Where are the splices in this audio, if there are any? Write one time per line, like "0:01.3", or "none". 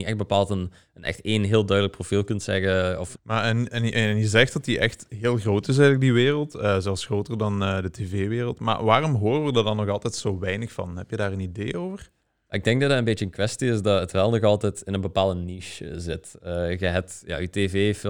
0:03.1